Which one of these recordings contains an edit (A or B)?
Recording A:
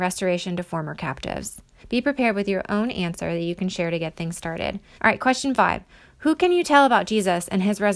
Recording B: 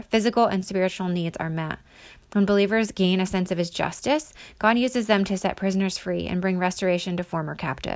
A